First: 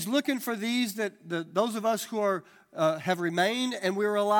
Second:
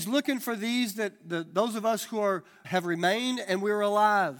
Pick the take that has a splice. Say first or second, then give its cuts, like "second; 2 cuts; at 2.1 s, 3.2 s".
second; 1 cut; at 2.6 s